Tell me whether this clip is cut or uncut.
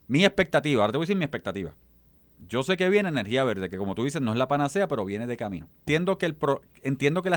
cut